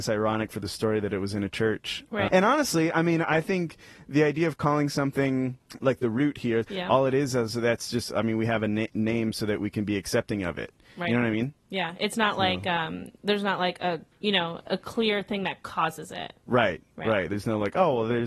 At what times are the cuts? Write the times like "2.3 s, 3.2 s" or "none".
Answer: 2.3 s, 6.6 s